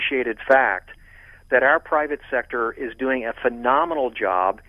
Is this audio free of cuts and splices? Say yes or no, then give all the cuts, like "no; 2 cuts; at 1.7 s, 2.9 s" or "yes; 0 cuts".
yes; 0 cuts